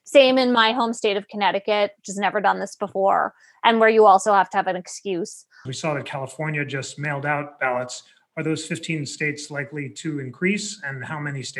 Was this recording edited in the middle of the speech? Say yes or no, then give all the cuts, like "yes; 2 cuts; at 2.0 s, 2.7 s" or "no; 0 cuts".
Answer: yes; 1 cut; at 5.7 s